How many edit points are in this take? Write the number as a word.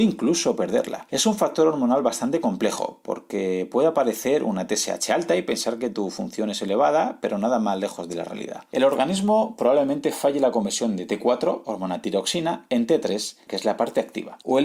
one